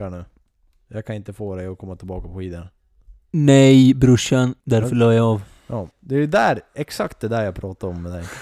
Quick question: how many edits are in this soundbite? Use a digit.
2